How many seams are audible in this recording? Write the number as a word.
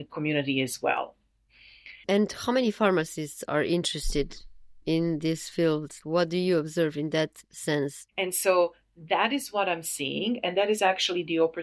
one